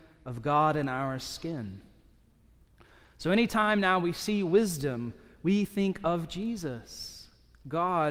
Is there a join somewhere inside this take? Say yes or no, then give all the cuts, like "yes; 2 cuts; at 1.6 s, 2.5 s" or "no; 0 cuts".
no; 0 cuts